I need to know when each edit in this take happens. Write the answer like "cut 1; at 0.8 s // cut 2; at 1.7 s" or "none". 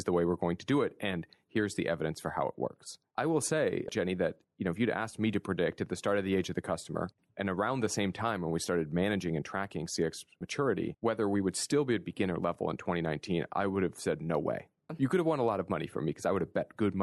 cut 1; at 14.9 s